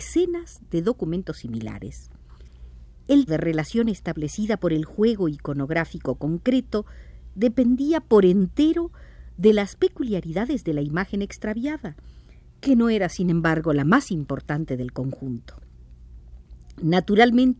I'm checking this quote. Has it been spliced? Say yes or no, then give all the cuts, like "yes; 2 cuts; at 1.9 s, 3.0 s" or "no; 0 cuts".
yes; 1 cut; at 3.3 s